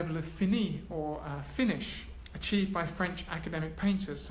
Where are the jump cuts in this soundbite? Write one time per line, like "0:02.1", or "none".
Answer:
none

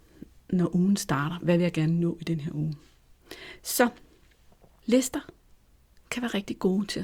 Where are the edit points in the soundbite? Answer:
none

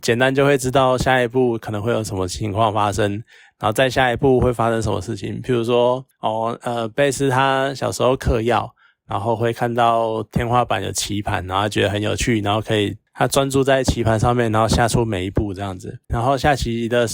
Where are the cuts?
0:16.1

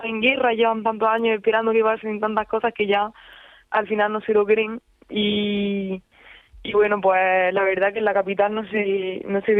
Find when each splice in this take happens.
none

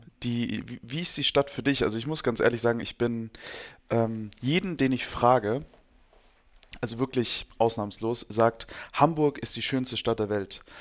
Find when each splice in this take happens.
none

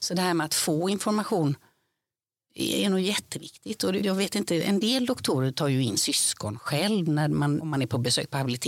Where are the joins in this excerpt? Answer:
0:04.0
0:07.6

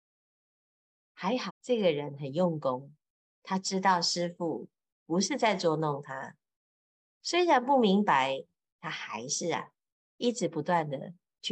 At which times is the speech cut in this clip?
0:01.5
0:10.0

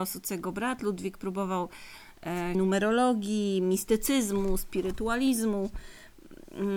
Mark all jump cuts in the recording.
0:02.5

